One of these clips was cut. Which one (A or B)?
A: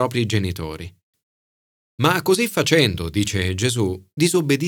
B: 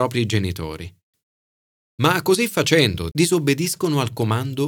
B